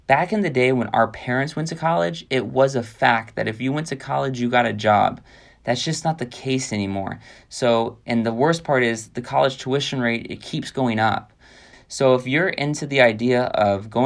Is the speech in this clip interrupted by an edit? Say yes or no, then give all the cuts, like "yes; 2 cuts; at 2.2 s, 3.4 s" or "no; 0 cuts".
yes; 1 cut; at 11.7 s